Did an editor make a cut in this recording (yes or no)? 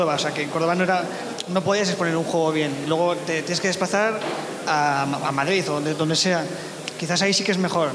no